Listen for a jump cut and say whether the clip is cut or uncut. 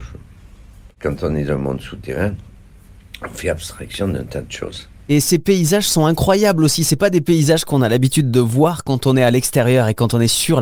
uncut